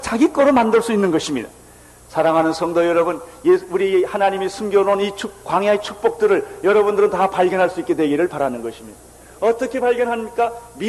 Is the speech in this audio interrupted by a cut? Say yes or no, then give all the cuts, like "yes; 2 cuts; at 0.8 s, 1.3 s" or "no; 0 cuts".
no; 0 cuts